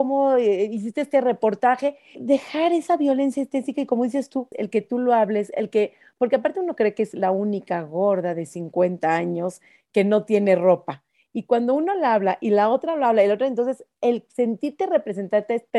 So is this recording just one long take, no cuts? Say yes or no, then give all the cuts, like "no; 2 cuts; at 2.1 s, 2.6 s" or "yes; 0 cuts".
no; 2 cuts; at 2.2 s, 4.5 s